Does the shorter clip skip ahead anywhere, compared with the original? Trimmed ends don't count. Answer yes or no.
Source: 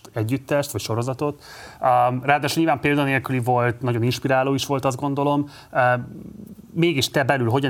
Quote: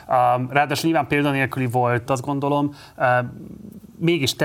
yes